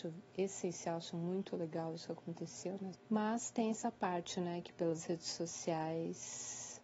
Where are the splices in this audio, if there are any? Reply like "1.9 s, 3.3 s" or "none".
2.9 s